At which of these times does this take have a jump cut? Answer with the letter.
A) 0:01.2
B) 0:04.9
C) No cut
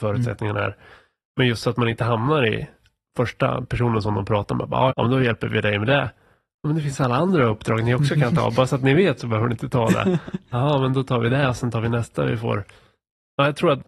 B